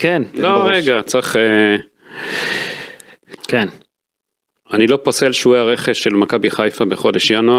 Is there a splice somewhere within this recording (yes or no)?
yes